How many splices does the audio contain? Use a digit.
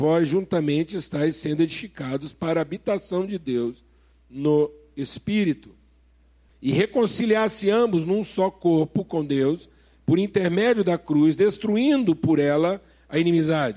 1